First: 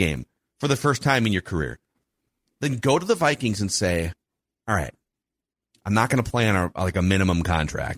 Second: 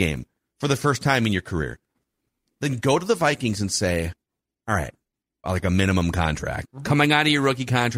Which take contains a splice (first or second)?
second